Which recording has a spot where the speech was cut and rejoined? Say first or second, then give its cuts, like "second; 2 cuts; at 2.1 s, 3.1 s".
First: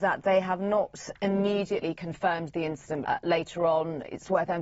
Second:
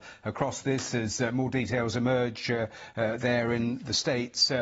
first; 1 cut; at 3.0 s